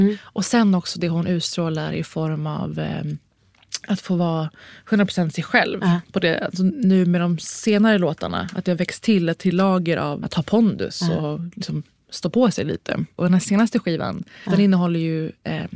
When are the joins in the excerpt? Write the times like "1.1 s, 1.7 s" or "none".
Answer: 10.2 s, 13.2 s, 14.4 s